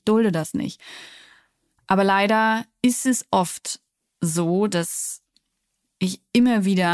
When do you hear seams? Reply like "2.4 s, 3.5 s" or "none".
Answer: none